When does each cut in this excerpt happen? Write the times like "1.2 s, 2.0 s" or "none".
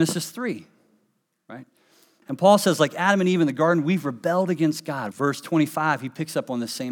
2.2 s, 5.1 s